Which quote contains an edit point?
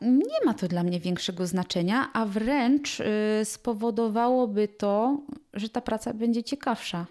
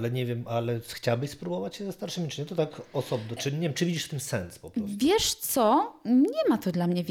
second; 1 cut; at 3.4 s

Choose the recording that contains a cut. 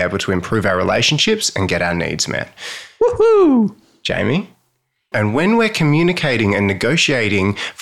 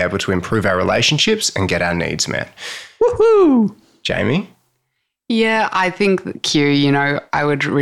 first; 1 cut; at 5.1 s

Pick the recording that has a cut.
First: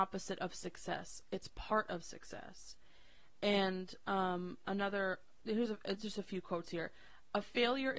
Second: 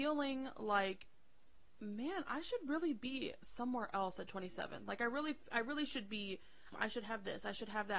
second; 1 cut; at 6.7 s

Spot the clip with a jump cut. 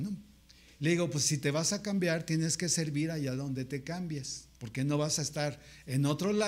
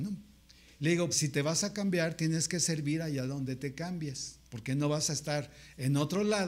second; 1 cut; at 1.1 s

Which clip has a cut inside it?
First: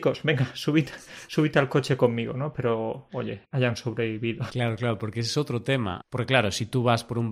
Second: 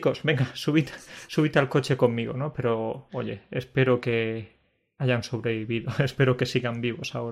first; 3 cuts; at 3.4 s, 4.5 s, 6.0 s

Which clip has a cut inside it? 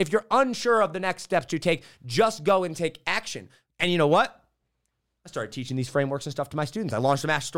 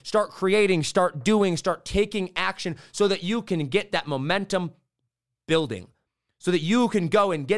first; 1 cut; at 3.7 s

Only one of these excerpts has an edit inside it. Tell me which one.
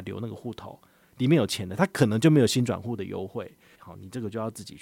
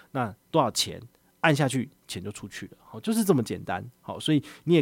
first; 1 cut; at 3.7 s

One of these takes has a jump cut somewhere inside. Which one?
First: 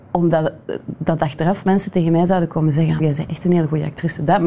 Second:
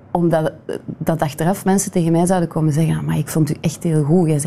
first; 1 cut; at 3.0 s

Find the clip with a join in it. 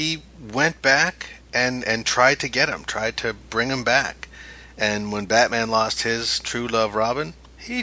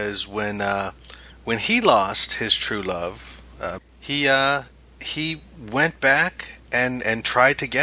second; 1 cut; at 3.8 s

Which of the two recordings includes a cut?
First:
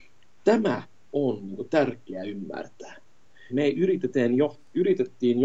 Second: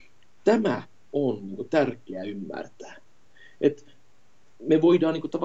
first; 1 cut; at 3.5 s

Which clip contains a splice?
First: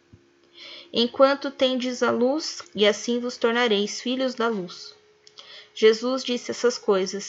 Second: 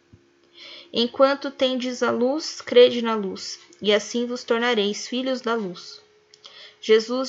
first; 1 cut; at 2.6 s

